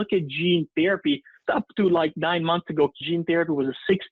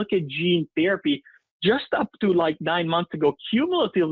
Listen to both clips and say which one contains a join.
first; 2 cuts; at 1.5 s, 3.0 s

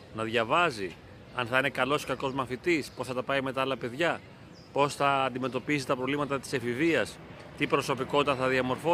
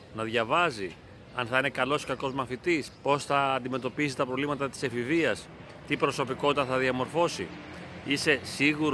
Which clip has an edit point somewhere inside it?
second; 1 cut; at 2.9 s

